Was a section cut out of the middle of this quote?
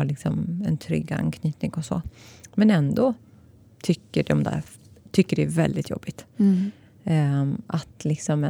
yes; 1 cut; at 6.9 s

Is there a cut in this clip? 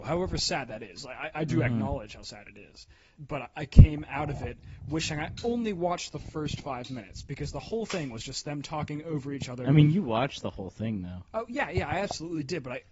yes; 1 cut; at 3.2 s

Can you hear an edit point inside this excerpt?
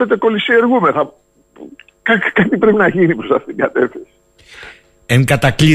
no; 0 cuts

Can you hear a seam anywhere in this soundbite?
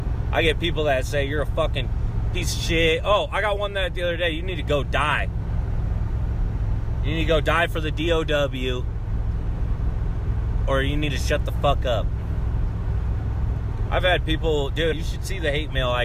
yes; 2 cuts; at 13.9 s, 14.9 s

